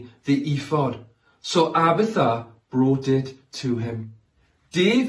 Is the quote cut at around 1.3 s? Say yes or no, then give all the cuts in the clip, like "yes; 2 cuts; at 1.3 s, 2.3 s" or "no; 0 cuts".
no; 0 cuts